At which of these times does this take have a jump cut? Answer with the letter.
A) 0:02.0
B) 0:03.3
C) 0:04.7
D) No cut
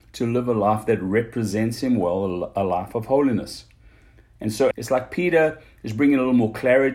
C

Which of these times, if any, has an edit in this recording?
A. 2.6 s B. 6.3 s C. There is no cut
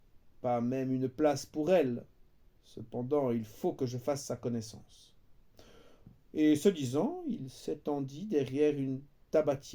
C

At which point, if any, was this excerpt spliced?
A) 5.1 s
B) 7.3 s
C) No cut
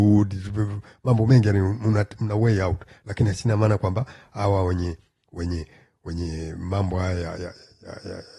B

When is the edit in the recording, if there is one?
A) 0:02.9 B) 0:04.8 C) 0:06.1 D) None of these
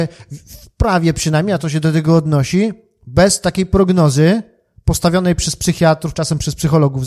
C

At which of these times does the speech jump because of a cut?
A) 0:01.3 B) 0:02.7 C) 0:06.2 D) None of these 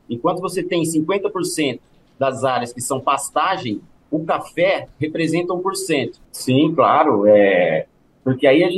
C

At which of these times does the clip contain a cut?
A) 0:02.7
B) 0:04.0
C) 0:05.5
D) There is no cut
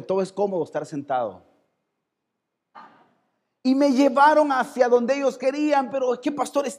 A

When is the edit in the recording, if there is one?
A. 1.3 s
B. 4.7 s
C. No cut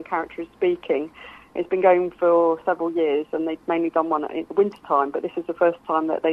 A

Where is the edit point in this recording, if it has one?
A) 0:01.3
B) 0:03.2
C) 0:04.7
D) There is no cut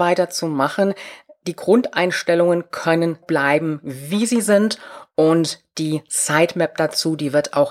B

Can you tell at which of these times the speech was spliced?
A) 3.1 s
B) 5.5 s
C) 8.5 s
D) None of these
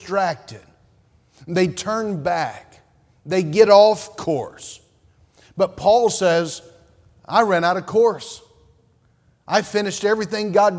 D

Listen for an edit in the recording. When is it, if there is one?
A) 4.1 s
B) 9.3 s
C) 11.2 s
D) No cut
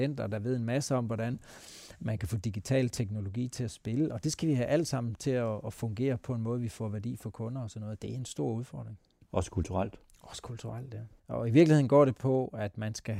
C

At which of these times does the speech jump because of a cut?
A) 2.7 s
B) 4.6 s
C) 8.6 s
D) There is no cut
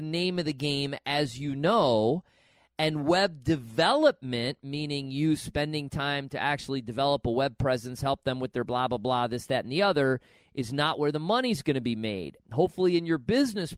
D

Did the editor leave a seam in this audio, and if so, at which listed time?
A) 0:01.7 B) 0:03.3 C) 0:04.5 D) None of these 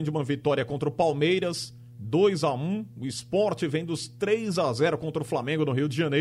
D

